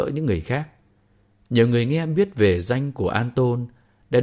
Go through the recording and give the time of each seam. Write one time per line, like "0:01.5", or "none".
none